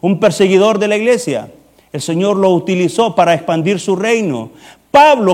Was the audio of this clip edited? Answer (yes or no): no